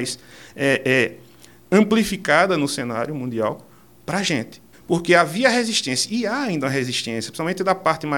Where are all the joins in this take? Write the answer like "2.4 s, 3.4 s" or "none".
4.7 s